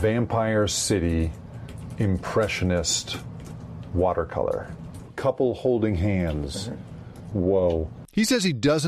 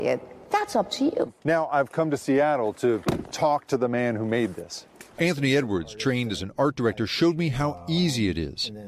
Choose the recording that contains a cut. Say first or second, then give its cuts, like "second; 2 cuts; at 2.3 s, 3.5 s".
second; 1 cut; at 1.4 s